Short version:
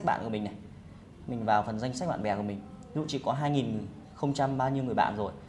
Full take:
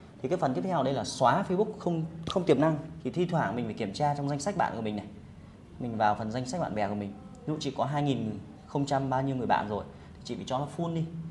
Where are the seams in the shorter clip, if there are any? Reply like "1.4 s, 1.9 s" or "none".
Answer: none